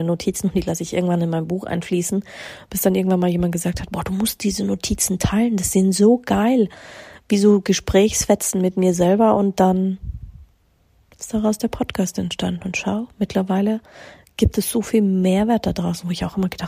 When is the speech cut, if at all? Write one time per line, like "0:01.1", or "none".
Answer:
none

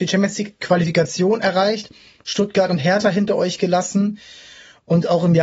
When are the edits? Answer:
none

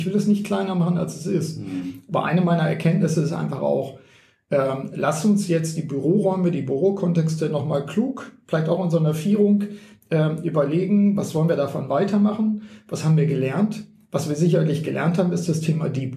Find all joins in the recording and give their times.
none

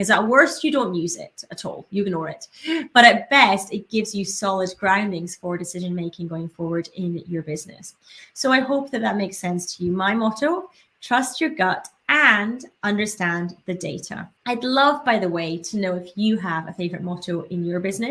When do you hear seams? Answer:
0:14.4

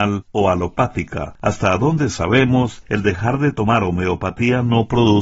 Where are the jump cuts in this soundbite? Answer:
none

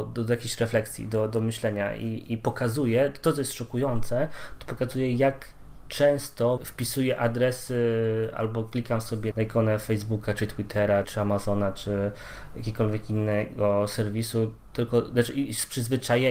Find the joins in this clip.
0:06.6
0:09.3
0:11.0

